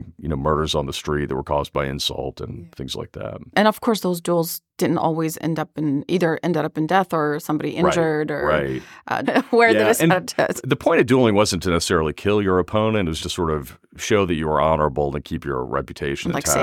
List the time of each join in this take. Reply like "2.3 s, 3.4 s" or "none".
9.2 s, 13.2 s